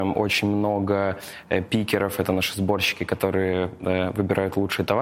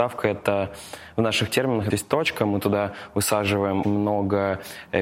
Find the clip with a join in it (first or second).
second